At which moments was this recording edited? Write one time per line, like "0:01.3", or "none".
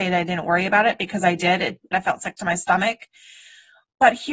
0:01.9